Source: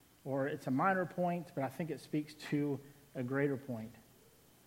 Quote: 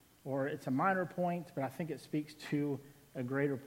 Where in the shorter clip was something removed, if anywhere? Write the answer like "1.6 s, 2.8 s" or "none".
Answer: none